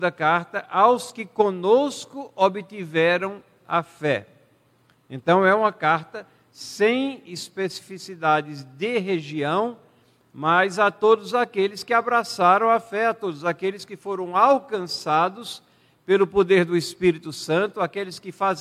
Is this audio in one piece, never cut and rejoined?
yes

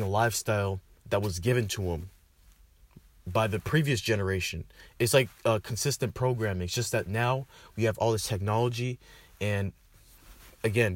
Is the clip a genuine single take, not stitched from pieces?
yes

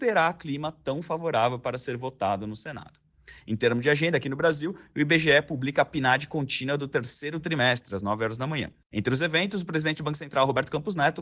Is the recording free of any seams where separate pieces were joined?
yes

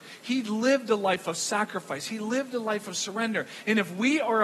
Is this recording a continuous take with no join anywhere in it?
yes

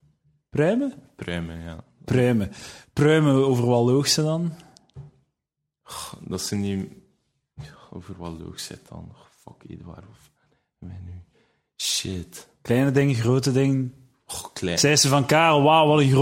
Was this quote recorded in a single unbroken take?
yes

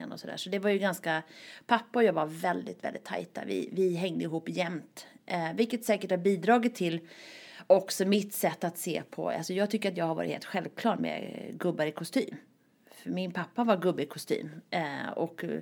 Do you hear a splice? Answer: no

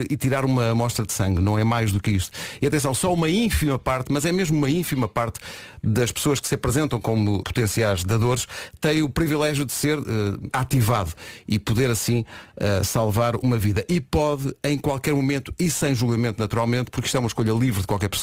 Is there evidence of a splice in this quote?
yes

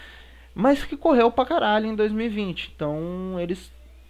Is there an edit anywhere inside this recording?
no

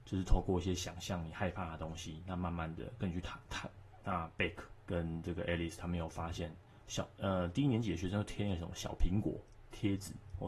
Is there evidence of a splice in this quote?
yes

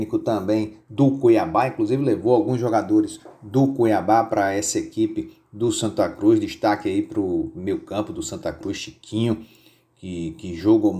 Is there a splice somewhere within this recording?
no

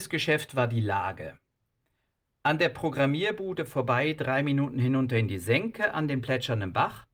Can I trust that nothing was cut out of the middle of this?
yes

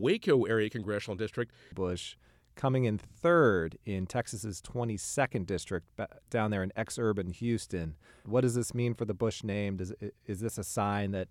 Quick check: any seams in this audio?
yes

